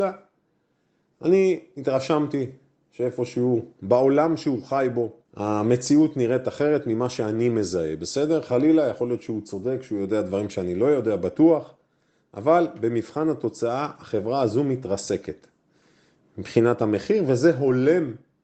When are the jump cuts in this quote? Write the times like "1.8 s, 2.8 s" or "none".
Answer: 5.2 s